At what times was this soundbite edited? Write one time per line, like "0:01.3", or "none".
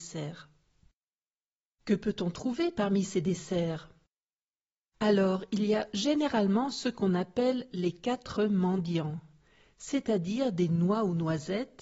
none